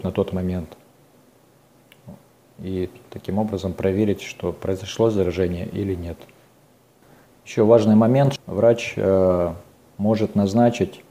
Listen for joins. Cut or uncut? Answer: cut